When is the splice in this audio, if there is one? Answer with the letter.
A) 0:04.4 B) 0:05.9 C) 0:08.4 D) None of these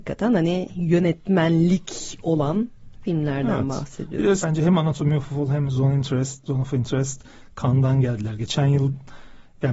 A